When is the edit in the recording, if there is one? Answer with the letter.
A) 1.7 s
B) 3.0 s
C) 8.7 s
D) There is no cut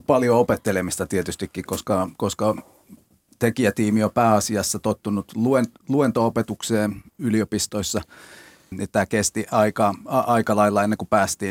C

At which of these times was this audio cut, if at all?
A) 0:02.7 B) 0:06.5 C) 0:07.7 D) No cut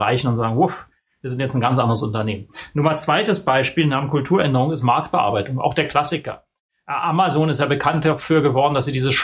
D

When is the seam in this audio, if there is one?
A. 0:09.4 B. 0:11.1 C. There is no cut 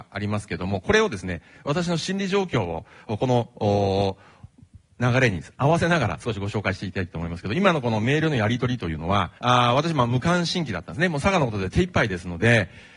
A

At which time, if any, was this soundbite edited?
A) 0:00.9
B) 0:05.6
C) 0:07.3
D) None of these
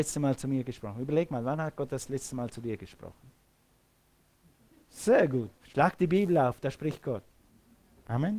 B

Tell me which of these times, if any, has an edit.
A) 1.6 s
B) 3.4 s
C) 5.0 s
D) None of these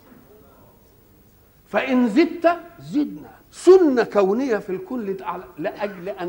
B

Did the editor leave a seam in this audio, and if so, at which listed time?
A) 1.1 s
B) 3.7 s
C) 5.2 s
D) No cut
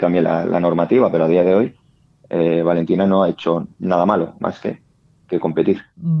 B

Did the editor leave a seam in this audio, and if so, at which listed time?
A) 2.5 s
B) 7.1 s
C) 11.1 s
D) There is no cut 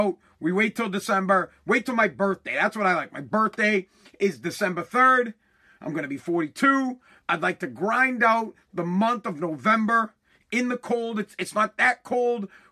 D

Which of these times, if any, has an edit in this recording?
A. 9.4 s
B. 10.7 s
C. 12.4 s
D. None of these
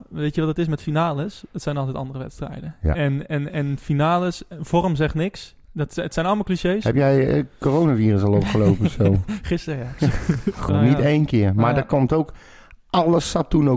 B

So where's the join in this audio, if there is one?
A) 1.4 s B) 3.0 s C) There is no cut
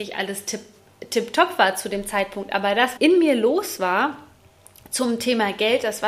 B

